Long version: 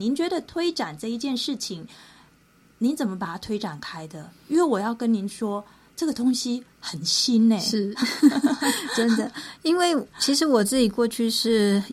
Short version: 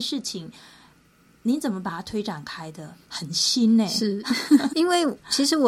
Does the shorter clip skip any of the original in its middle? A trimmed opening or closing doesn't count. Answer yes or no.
yes